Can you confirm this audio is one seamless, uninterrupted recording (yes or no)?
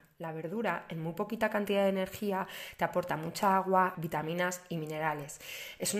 no